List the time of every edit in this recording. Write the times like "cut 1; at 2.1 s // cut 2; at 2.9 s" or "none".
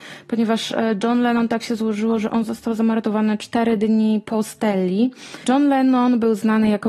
cut 1; at 5.4 s